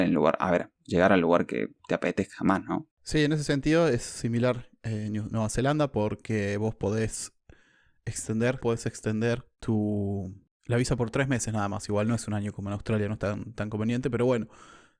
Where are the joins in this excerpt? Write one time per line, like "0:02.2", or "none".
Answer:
0:08.6